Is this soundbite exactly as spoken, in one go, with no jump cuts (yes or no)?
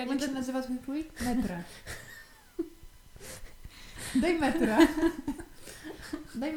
yes